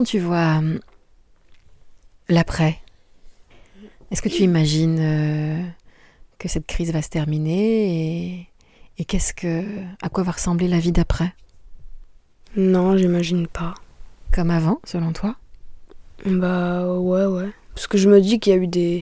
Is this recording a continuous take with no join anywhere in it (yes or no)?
yes